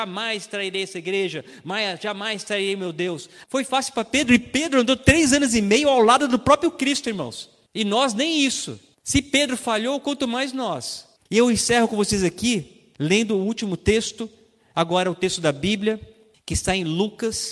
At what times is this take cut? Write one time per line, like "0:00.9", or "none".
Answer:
0:03.4
0:12.9